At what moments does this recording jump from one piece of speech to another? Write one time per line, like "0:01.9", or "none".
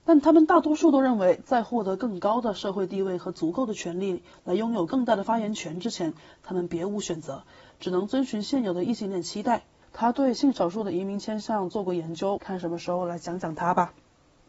0:09.8
0:12.4